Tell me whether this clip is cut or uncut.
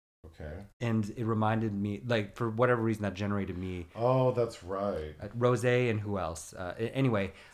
uncut